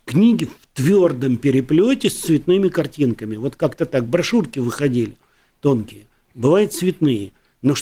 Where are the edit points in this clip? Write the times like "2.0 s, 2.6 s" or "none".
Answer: none